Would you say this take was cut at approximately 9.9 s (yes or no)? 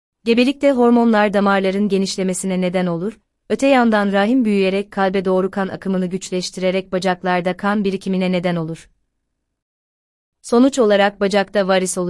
no